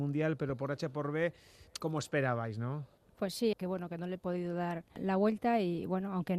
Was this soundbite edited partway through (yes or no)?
yes